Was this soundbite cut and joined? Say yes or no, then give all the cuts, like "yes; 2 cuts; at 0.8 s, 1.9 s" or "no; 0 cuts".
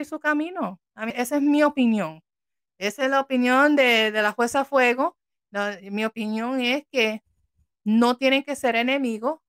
yes; 1 cut; at 1.1 s